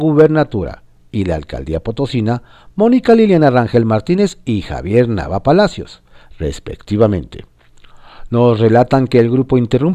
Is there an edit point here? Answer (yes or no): no